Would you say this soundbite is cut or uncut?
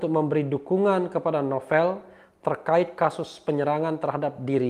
uncut